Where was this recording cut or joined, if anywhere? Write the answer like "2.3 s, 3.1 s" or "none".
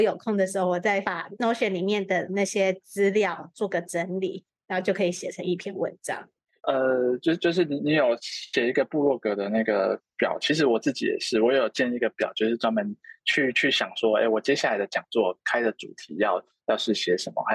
6.6 s